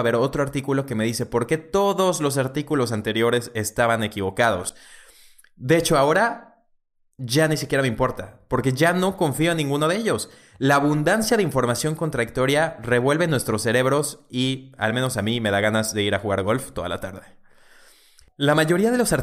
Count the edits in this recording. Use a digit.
0